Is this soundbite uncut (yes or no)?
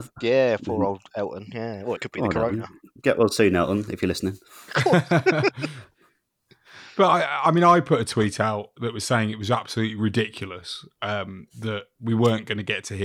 yes